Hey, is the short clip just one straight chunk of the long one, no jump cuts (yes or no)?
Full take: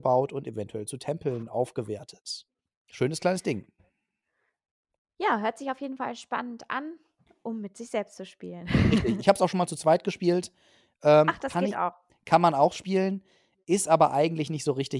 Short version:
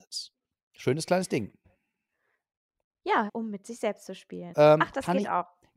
no